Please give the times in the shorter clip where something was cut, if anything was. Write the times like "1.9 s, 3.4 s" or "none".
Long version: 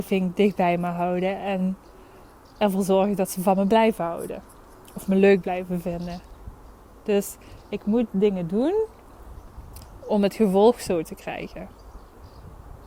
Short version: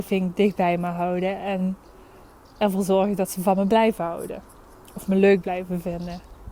none